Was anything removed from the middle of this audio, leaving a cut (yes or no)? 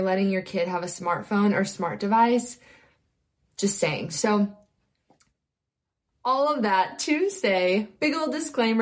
no